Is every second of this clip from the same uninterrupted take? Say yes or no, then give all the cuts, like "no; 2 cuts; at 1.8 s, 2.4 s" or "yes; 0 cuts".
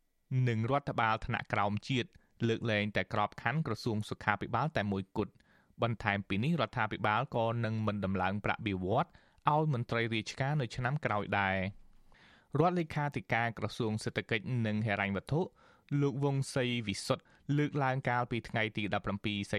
yes; 0 cuts